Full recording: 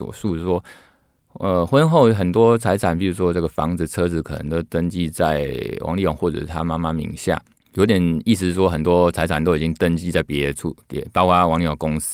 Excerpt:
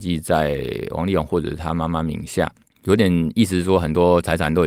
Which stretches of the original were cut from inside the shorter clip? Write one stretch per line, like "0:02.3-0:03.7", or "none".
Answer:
none